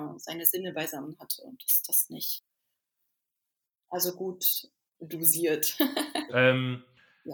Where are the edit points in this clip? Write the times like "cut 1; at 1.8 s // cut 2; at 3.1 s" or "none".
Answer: cut 1; at 6.3 s